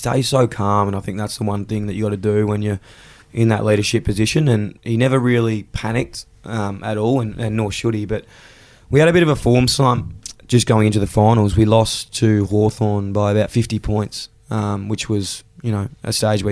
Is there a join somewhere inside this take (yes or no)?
no